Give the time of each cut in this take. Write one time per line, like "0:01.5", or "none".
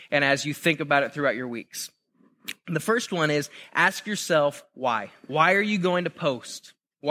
0:05.2